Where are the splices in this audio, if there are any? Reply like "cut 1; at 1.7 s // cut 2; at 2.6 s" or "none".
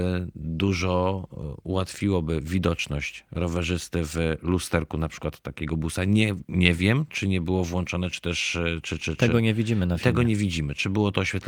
cut 1; at 9.0 s